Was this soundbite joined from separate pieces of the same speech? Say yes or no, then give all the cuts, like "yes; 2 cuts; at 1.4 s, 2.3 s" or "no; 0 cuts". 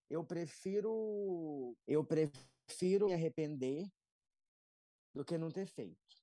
yes; 1 cut; at 1.8 s